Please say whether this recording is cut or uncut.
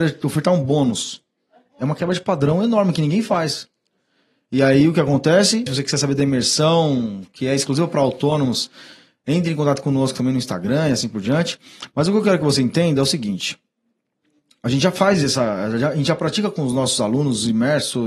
cut